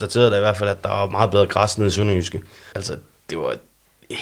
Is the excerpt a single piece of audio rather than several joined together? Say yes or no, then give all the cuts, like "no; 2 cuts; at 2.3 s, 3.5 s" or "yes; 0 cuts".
no; 1 cut; at 2.7 s